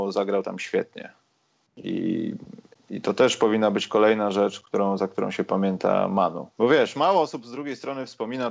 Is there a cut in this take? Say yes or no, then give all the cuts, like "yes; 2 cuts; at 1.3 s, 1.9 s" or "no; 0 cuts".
yes; 1 cut; at 6.5 s